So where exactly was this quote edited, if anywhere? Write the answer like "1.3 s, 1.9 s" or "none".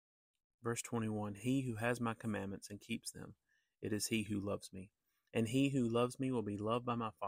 none